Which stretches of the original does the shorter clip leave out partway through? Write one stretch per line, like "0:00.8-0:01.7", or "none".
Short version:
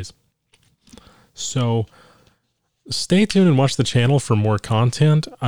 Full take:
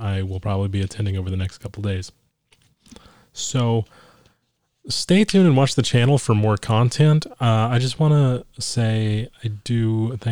none

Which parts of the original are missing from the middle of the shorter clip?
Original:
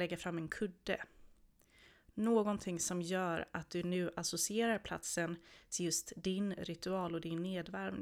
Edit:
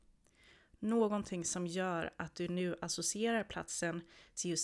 none

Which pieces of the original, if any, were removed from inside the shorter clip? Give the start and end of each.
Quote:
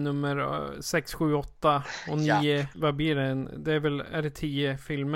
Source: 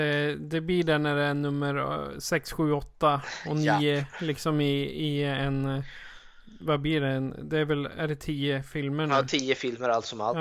0:04.1-0:06.6

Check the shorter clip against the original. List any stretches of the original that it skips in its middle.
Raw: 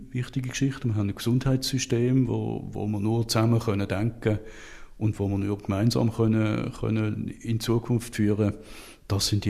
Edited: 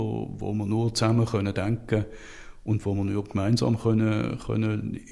none

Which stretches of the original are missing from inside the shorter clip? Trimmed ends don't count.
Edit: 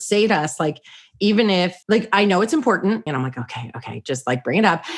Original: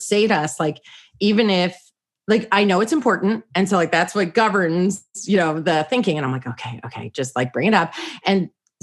0:01.8-0:02.2
0:03.5-0:06.2

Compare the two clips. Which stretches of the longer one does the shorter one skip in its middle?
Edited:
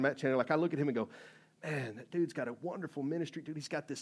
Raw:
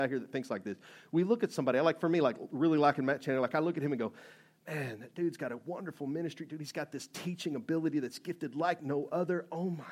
none

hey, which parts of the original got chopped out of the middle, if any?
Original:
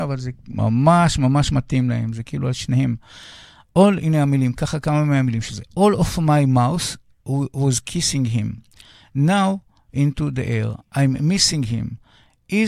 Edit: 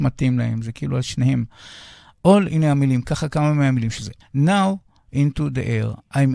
0:05.7-0:09.0

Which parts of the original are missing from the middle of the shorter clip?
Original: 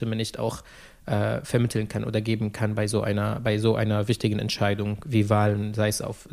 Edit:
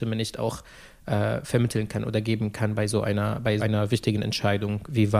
0:03.6-0:03.8

